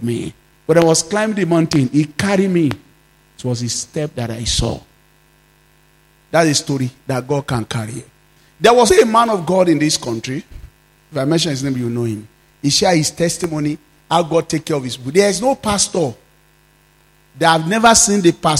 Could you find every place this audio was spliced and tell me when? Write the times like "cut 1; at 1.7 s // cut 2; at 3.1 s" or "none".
cut 1; at 8.9 s